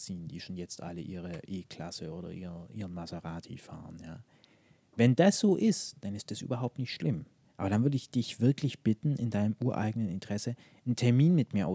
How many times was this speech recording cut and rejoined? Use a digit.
1